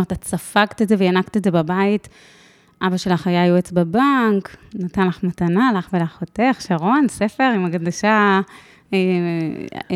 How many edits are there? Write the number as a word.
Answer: zero